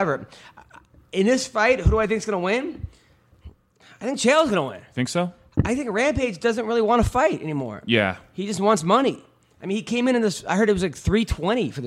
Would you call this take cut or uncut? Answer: uncut